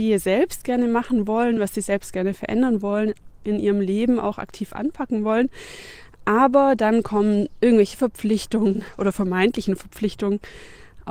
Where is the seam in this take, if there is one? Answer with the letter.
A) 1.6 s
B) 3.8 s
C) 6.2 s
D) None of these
D